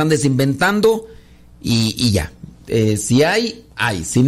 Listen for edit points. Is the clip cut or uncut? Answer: uncut